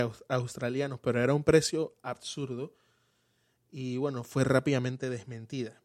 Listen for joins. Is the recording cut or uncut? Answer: uncut